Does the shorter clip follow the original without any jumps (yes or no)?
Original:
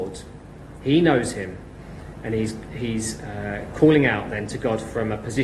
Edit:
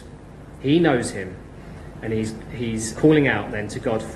no